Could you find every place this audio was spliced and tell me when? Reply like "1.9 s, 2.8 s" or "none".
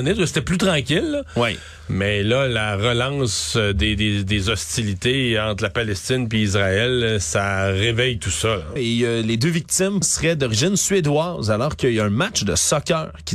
8.8 s, 10.0 s